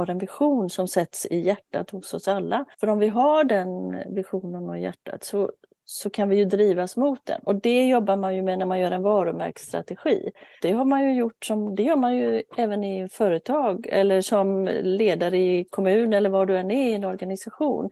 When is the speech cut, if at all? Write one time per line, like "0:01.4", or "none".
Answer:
0:02.7
0:10.6